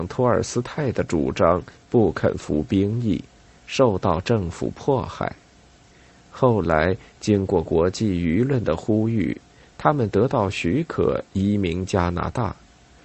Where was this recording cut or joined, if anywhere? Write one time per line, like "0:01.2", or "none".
none